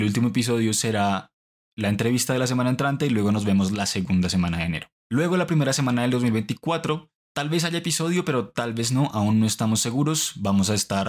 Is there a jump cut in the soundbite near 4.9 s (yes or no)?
yes